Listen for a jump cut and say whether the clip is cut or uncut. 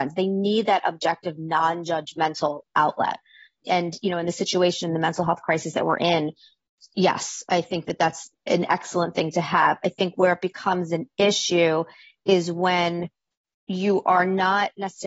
uncut